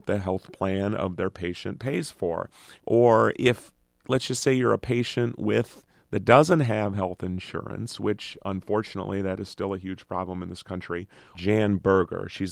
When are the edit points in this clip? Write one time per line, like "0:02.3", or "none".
0:02.7
0:11.3